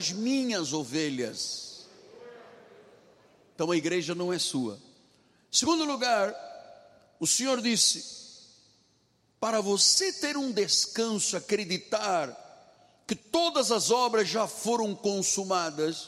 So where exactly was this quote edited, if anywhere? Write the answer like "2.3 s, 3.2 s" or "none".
none